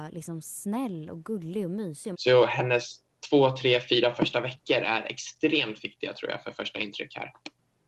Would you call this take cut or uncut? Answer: cut